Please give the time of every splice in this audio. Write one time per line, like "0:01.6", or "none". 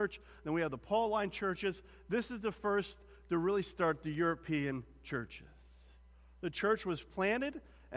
none